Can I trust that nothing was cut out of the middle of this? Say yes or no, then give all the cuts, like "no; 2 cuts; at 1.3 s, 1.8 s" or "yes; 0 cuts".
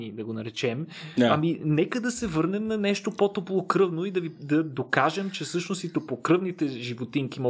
yes; 0 cuts